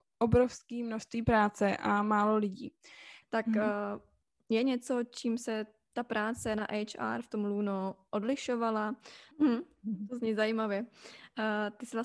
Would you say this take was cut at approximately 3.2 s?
yes; 2 cuts; at 3.2 s, 9.3 s

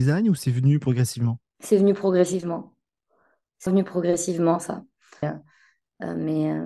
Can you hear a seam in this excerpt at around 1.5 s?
yes; 3 cuts; at 1.5 s, 3.7 s, 5.2 s

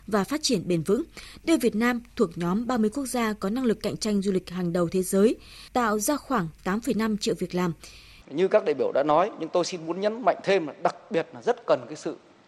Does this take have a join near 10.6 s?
no; 2 cuts; at 5.7 s, 8.2 s

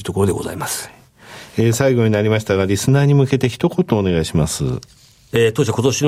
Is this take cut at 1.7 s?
no; 0 cuts

